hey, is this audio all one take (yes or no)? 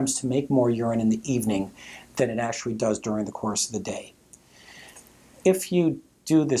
no